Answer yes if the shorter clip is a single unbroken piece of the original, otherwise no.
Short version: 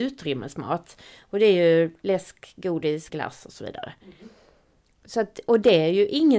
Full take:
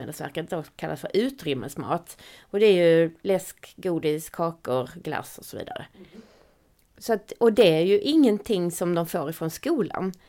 no